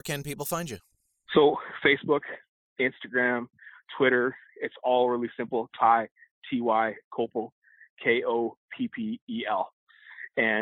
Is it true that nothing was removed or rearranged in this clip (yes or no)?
yes